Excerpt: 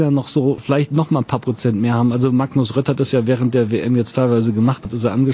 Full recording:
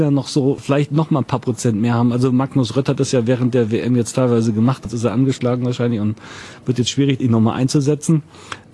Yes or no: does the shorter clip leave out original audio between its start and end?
no